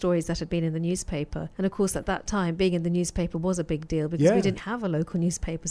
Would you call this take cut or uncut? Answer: cut